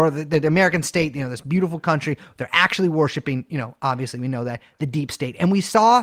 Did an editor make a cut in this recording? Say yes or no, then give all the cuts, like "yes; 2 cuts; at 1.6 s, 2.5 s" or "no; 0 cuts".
no; 0 cuts